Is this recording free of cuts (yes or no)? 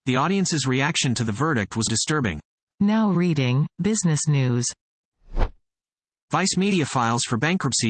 no